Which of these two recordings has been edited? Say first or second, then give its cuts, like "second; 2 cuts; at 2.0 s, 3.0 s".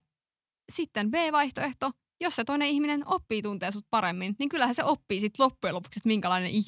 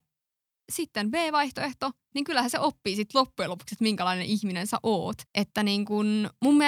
second; 2 cuts; at 2.1 s, 5.3 s